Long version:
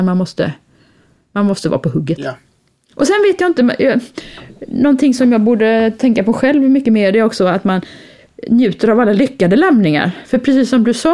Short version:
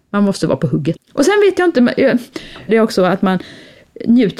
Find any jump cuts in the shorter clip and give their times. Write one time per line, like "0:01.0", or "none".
0:01.0
0:02.7